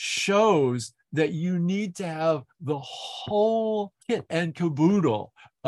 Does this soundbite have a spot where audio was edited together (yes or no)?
yes